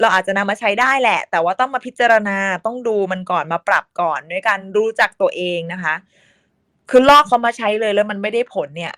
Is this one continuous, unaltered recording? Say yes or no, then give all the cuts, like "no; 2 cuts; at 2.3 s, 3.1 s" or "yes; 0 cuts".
yes; 0 cuts